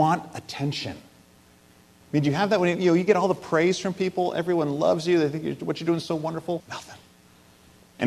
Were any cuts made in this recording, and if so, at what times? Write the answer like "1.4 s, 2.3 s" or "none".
2.0 s, 6.6 s